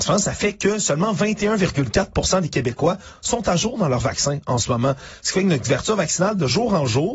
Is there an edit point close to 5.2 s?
no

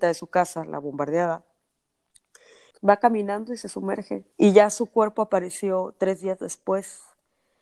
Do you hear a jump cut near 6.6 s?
no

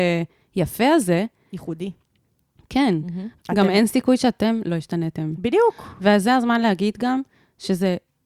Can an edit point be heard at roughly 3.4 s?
yes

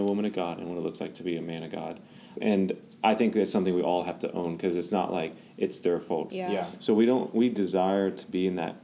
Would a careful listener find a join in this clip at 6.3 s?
yes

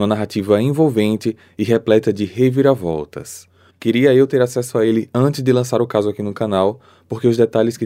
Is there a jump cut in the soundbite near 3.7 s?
yes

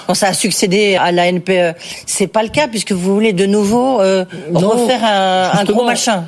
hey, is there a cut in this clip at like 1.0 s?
yes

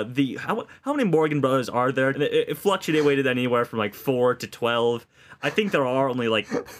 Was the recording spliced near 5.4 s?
no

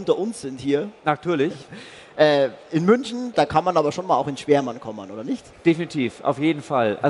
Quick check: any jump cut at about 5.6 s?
no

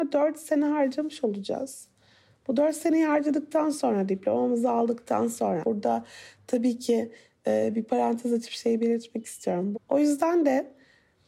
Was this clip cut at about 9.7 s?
yes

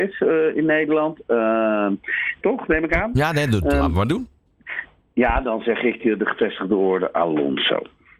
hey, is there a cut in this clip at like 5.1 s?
no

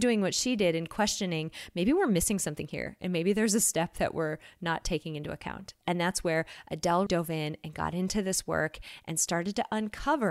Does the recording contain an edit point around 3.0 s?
no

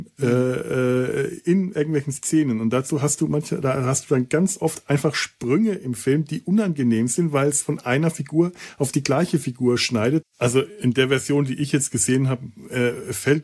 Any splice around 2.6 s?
no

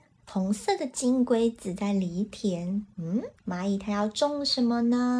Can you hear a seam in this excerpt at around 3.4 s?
yes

